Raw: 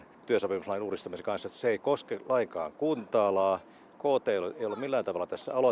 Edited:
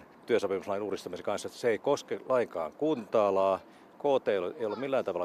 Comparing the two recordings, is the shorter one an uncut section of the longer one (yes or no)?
yes